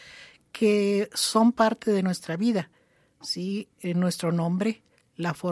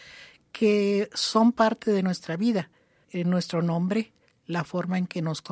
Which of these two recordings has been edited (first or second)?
second